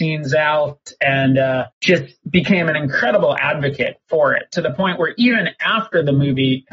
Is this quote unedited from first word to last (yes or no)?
no